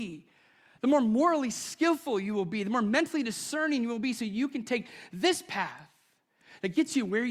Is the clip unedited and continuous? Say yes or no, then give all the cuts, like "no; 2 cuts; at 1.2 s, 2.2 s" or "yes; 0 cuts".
yes; 0 cuts